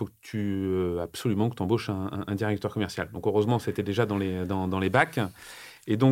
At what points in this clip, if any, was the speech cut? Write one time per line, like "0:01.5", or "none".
none